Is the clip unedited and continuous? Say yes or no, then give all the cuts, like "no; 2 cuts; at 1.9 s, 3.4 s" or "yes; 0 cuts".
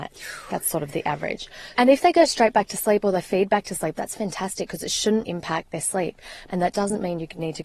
no; 3 cuts; at 1.8 s, 5.2 s, 6.5 s